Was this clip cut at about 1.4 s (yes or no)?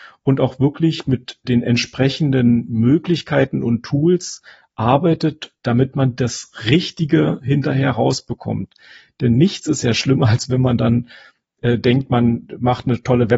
yes